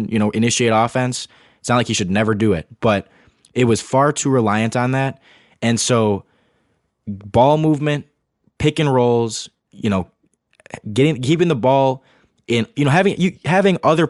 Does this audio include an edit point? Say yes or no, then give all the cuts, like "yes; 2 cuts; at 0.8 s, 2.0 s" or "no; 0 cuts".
no; 0 cuts